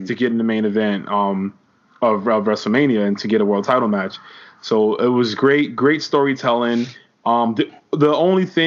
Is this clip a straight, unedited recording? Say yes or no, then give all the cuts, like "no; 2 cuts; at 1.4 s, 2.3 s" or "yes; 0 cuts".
yes; 0 cuts